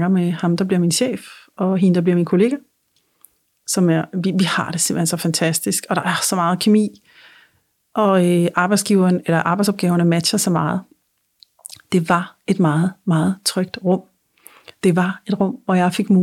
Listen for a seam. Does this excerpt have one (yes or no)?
no